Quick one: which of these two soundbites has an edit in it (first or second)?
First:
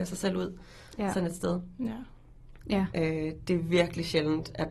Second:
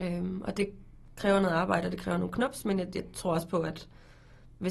first